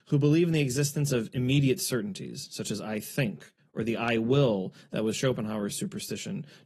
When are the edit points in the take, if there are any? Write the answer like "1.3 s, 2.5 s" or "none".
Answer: none